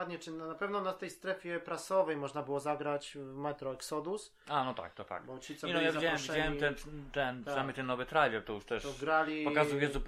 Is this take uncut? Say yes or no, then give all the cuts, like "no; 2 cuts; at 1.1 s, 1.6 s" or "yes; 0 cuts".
yes; 0 cuts